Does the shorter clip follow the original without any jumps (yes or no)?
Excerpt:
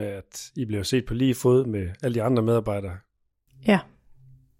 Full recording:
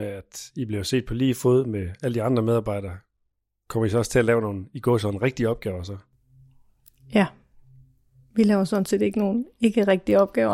no